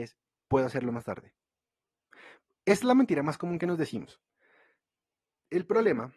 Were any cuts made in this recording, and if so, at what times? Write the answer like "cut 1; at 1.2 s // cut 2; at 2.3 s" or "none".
none